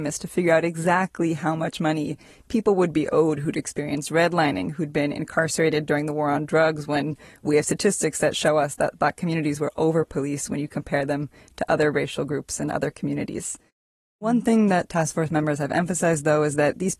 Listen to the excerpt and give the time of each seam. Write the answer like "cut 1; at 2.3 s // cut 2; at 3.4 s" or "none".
none